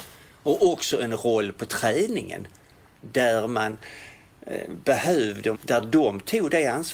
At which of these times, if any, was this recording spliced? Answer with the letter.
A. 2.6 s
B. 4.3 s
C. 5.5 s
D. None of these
C